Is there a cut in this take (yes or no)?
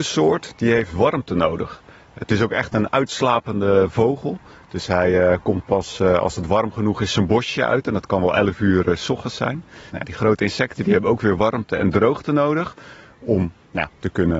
yes